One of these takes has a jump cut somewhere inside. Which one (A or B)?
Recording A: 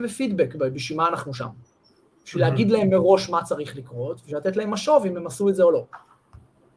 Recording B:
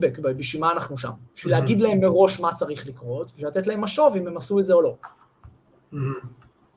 B